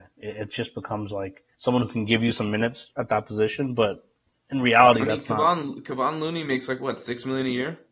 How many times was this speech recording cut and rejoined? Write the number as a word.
one